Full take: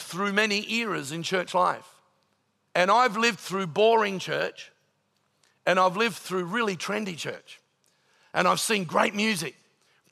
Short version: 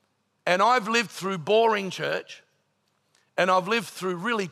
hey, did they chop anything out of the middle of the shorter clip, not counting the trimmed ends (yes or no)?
no